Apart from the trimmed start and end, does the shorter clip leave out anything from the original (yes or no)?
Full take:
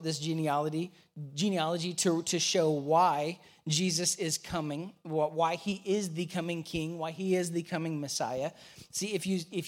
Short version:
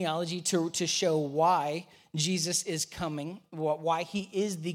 no